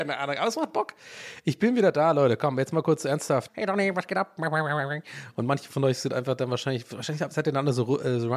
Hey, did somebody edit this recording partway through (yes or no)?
yes